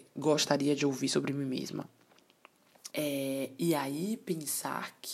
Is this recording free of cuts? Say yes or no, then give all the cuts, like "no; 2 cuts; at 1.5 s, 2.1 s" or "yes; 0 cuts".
no; 1 cut; at 2.9 s